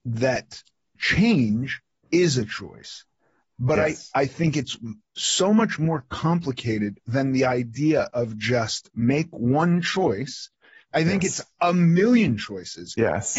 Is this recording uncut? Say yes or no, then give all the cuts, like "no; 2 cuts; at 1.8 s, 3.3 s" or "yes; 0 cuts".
yes; 0 cuts